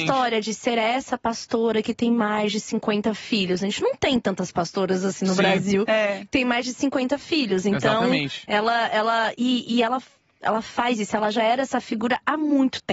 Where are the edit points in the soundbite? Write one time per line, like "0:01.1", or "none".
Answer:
none

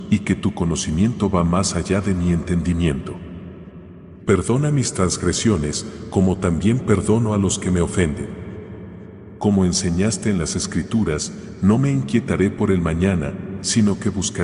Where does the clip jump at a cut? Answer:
0:04.2
0:09.4

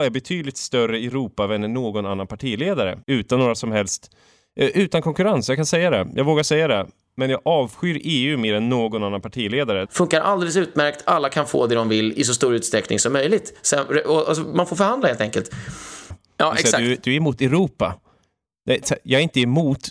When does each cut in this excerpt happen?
0:03.0
0:09.9
0:16.1

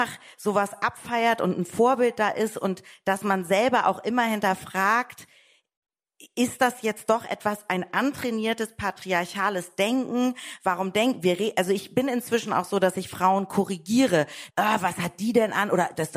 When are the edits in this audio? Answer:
0:14.5

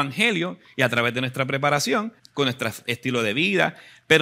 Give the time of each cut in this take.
0:02.2

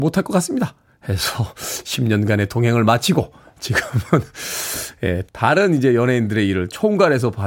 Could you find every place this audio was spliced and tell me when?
0:05.3

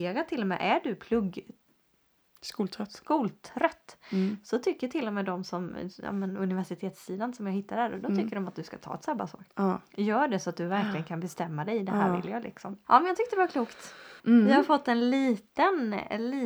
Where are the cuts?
0:12.8
0:14.2

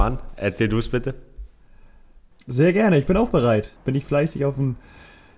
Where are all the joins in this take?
0:02.3
0:03.8

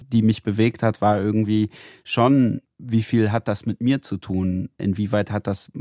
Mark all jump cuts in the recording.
none

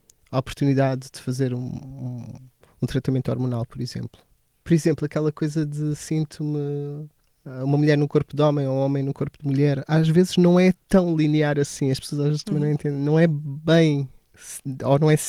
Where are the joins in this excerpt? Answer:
none

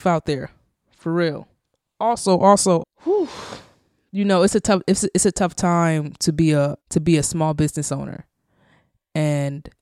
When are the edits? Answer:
0:02.8
0:06.8

